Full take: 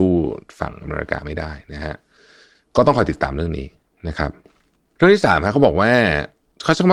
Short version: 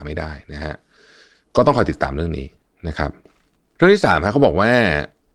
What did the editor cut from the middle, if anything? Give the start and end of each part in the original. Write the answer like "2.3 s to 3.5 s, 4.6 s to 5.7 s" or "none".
none